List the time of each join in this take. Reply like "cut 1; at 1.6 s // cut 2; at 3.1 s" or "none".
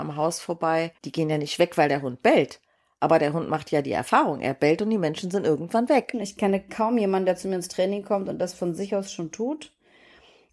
cut 1; at 1.0 s // cut 2; at 6.1 s